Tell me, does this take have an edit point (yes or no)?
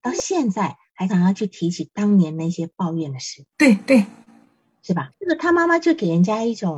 yes